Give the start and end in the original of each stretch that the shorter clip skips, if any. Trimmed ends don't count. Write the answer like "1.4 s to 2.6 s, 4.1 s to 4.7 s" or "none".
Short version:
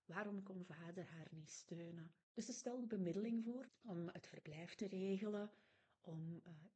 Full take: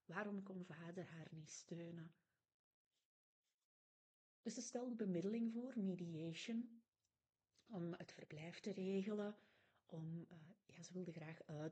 2.2 s to 4.3 s, 5.7 s to 7.5 s